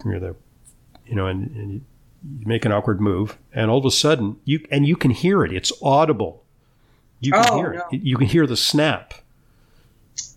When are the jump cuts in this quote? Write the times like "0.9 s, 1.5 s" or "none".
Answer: none

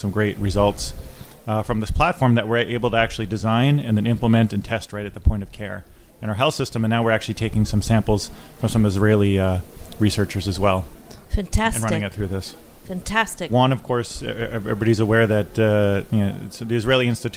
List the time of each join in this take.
13.5 s

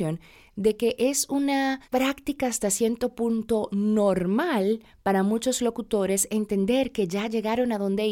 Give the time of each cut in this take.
1.8 s

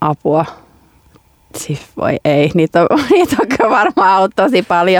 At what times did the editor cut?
none

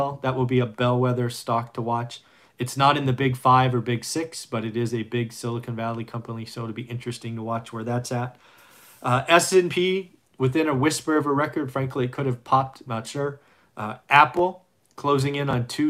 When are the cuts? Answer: 12.9 s

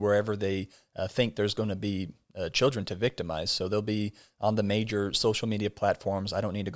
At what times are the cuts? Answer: none

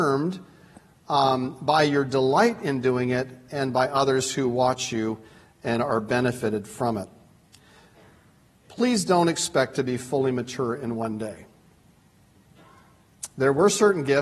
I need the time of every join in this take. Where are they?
none

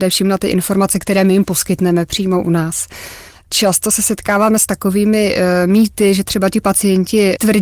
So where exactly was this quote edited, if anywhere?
none

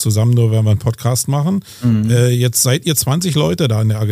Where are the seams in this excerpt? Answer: none

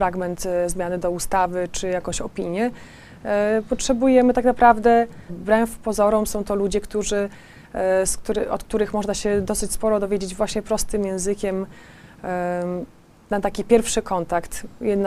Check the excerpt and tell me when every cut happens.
5.3 s

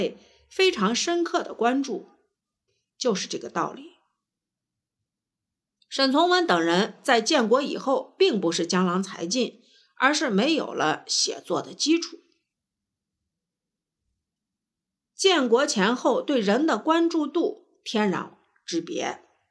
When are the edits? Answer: 2.7 s

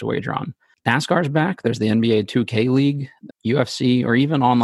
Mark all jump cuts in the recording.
3.3 s

